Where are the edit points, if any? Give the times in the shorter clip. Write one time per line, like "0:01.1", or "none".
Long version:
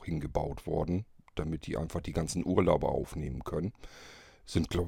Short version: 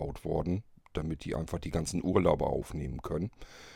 none